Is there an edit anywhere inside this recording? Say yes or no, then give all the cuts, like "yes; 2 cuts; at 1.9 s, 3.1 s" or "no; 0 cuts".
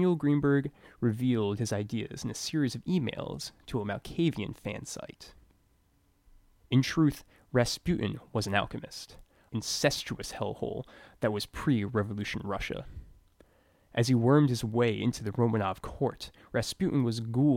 yes; 1 cut; at 9.5 s